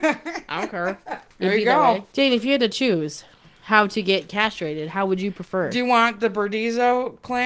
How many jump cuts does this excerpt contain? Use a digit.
0